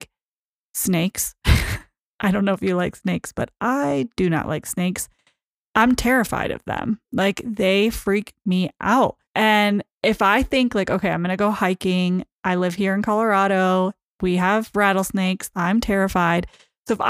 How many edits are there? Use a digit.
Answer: 2